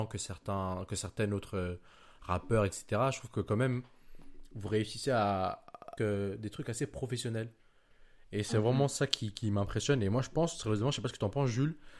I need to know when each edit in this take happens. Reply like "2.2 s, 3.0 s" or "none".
2.7 s, 6.0 s